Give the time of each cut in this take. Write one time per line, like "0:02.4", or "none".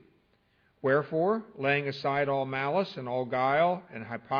none